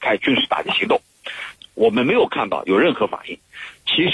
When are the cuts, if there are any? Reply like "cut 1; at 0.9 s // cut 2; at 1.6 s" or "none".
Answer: cut 1; at 1.6 s

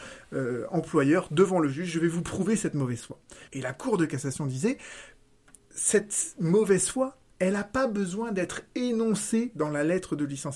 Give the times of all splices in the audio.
cut 1; at 3.5 s // cut 2; at 5.6 s

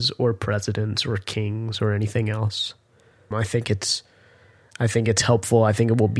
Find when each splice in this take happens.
cut 1; at 3.3 s

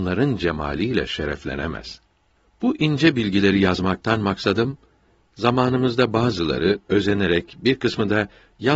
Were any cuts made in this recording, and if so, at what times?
none

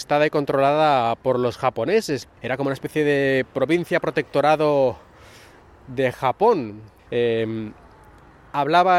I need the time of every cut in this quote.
cut 1; at 2.2 s // cut 2; at 7.1 s

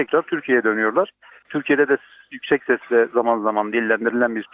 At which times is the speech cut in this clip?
cut 1; at 1.4 s

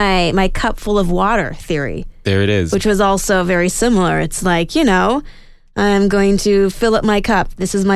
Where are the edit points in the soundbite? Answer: none

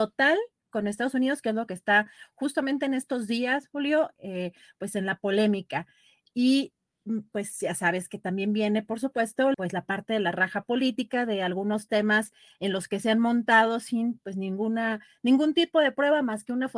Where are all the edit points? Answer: cut 1; at 9.5 s

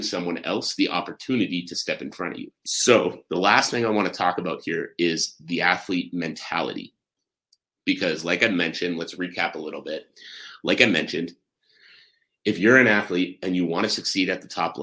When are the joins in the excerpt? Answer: cut 1; at 2.6 s

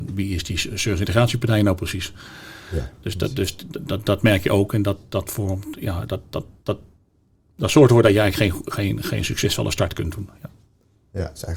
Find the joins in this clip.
none

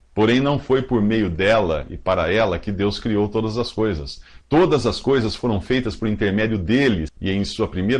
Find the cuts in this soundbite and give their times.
cut 1; at 4.4 s // cut 2; at 7.1 s

